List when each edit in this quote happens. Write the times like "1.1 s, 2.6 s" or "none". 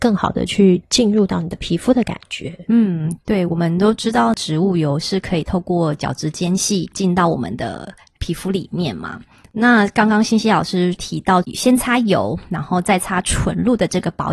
none